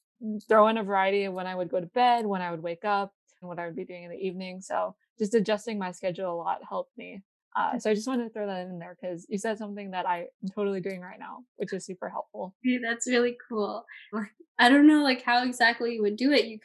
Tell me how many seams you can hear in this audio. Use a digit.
2